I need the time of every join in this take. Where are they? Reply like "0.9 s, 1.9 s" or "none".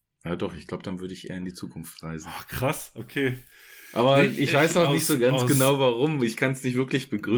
none

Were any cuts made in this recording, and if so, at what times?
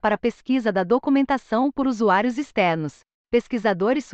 3.2 s

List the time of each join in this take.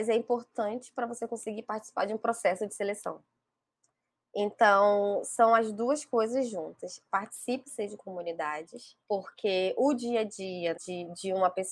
9.0 s, 10.7 s

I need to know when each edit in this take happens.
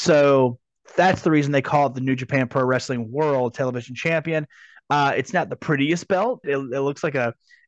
6.4 s

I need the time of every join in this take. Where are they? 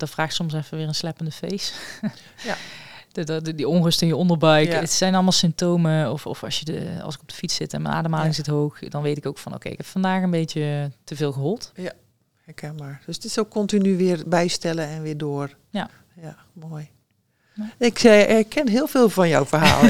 none

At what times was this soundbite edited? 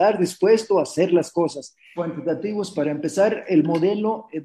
2.0 s

